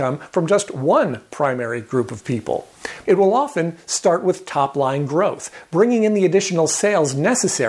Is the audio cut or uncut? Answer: cut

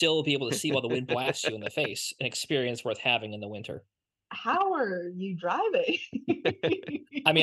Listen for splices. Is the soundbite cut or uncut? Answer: cut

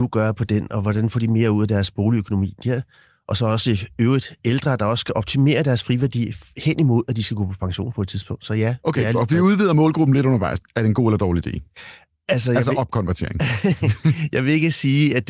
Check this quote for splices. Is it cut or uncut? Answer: cut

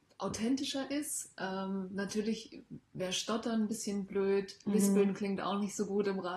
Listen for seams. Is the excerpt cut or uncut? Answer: uncut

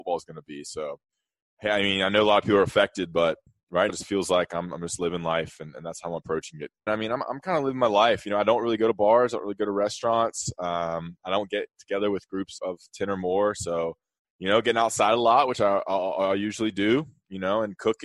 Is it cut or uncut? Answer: cut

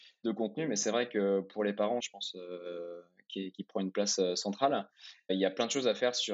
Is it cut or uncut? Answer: cut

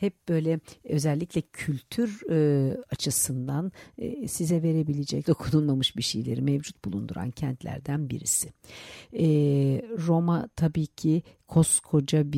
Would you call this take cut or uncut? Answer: cut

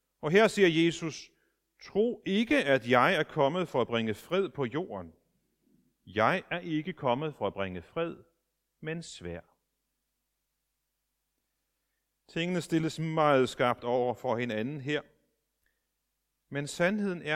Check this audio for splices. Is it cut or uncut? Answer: uncut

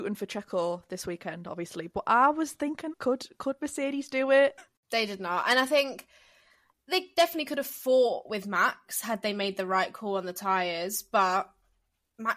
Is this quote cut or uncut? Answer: cut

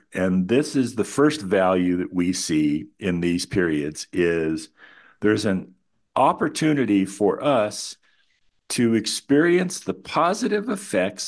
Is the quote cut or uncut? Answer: uncut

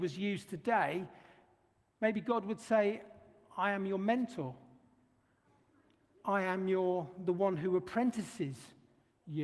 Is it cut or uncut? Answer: uncut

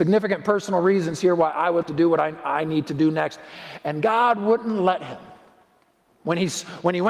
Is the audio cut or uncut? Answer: cut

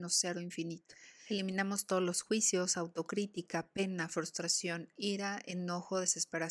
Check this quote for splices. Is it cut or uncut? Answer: uncut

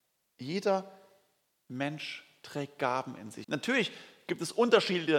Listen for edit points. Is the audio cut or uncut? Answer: cut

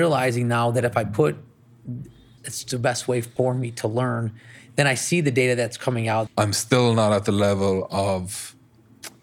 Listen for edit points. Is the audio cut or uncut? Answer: cut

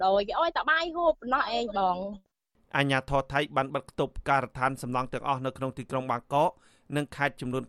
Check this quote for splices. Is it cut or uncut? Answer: uncut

